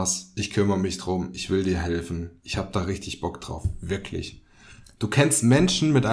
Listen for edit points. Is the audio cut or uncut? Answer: uncut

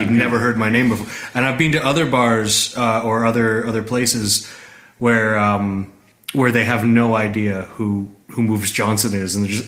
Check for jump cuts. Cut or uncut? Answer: uncut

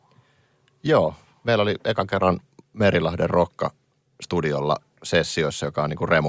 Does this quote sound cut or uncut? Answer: uncut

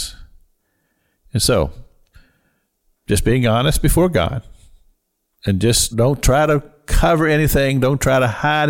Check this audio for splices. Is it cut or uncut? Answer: cut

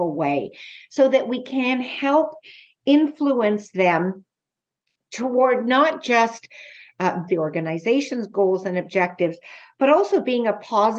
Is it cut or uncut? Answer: cut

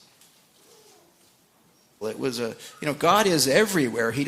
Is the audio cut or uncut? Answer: cut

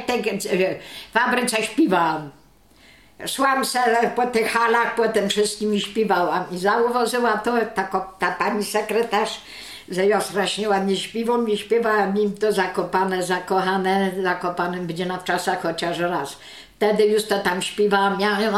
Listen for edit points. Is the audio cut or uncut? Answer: uncut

